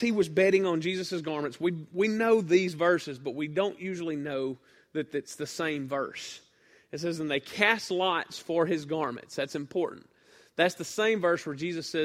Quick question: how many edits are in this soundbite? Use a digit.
0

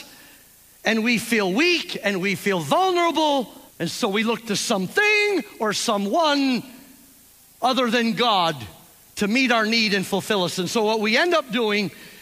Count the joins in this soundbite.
1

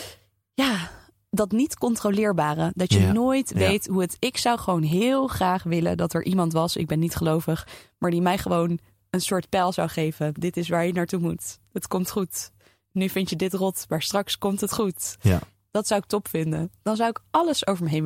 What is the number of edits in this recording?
0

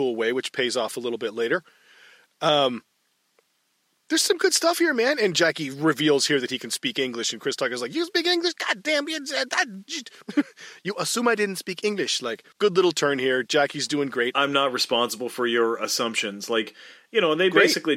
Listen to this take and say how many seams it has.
0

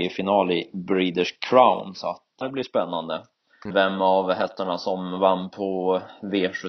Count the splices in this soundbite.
2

